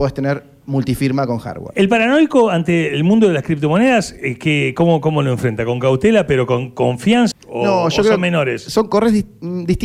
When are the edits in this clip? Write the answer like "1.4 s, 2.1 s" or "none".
7.3 s